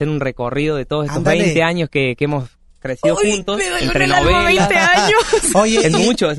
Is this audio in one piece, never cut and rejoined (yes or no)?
yes